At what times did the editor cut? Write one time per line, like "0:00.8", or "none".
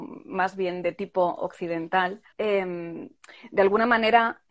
0:02.3

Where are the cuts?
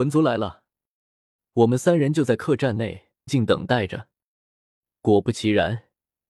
0:01.4
0:03.3

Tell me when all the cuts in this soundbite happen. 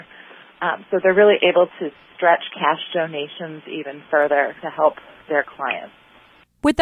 0:04.6

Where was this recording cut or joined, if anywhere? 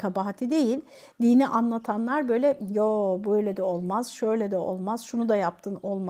none

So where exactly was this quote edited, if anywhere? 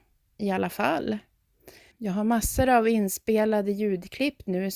0:01.9

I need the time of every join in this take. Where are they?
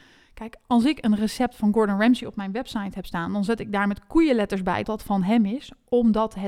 0:04.8

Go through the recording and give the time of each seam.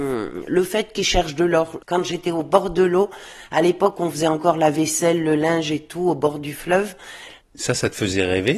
0:01.8
0:07.4

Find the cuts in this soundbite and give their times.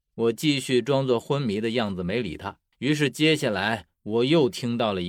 0:02.7

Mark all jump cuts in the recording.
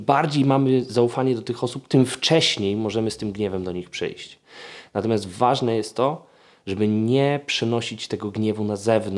none

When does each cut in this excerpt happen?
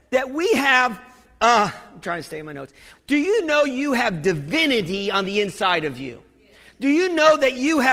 0:02.9

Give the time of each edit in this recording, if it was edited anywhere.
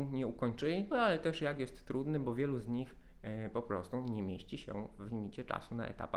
0:00.9

